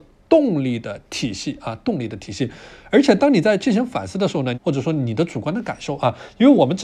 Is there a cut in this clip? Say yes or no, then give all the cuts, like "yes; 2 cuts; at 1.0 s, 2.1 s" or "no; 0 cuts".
yes; 1 cut; at 4.5 s